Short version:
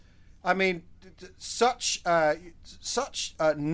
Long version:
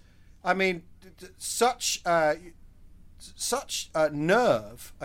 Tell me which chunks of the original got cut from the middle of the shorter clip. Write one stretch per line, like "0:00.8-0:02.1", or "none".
0:02.6-0:03.1